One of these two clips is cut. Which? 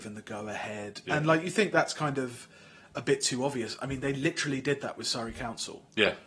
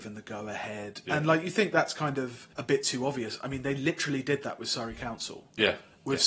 second; 1 cut; at 2.5 s

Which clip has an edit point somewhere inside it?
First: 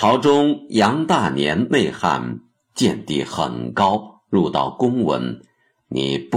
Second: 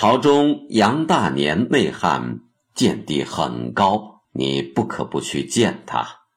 second; 1 cut; at 4.2 s

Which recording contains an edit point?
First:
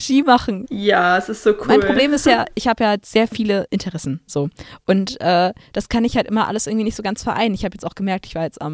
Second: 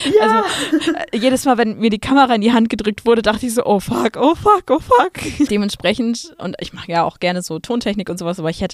second; 1 cut; at 5.5 s

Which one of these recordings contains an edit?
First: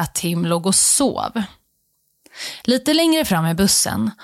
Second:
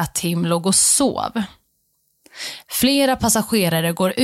second; 1 cut; at 2.6 s

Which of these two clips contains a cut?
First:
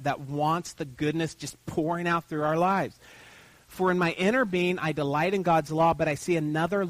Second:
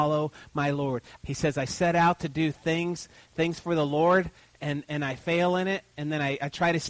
second; 2 cuts; at 1.2 s, 4.8 s

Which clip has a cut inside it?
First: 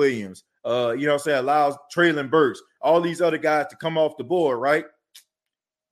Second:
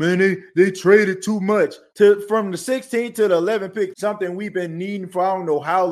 second; 2 cuts; at 1.9 s, 3.9 s

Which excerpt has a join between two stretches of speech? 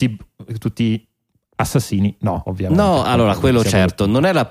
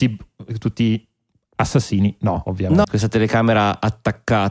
second; 1 cut; at 2.8 s

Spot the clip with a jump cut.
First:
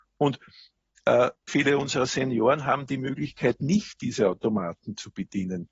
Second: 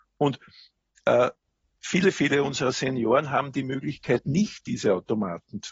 first; 1 cut; at 1.5 s

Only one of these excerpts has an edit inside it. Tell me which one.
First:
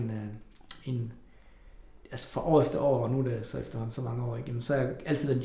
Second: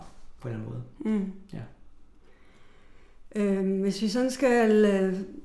first; 1 cut; at 2.0 s

